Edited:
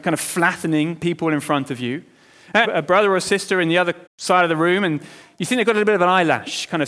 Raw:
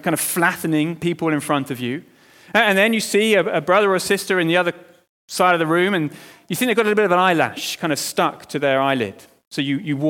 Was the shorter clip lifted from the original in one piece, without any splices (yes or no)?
no